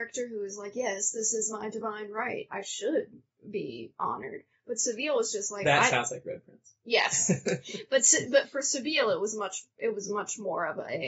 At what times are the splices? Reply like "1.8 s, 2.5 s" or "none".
none